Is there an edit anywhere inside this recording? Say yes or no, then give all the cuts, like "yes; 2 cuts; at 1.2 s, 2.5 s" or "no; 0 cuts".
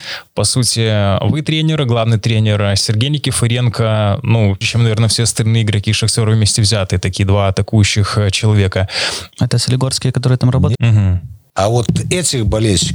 yes; 3 cuts; at 4.6 s, 9.3 s, 10.7 s